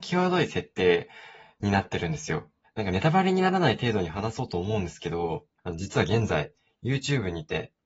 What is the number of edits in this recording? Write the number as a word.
two